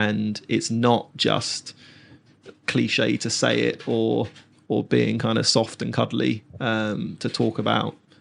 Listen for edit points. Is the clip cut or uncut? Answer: cut